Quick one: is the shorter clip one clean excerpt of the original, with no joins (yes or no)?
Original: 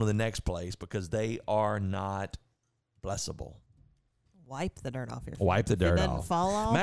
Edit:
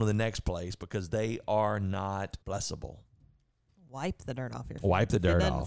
no